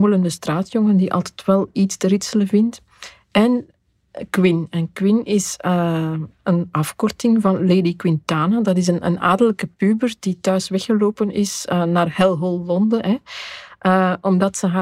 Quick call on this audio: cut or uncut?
uncut